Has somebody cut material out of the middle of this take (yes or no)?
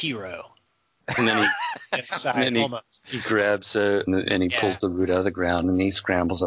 yes